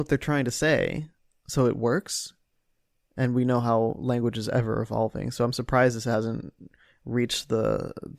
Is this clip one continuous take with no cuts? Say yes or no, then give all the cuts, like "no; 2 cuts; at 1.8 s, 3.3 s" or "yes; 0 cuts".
yes; 0 cuts